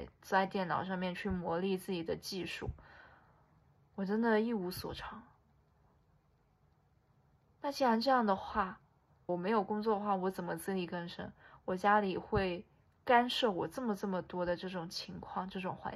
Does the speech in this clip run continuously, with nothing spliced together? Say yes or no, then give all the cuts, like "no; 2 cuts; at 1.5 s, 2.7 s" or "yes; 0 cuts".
no; 2 cuts; at 9.3 s, 11.6 s